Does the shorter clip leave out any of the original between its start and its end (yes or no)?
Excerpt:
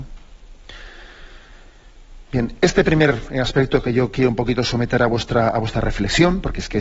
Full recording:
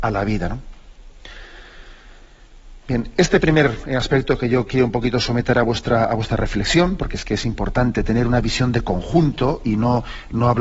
no